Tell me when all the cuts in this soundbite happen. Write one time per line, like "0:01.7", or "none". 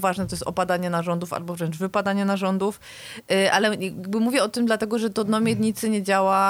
none

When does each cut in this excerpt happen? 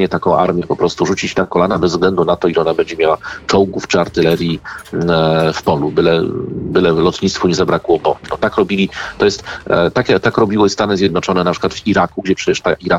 none

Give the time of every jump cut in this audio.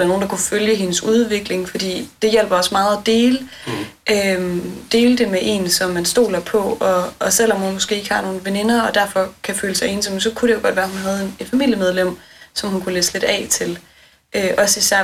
none

